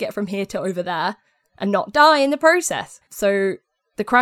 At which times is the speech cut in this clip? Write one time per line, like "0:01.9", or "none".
0:03.0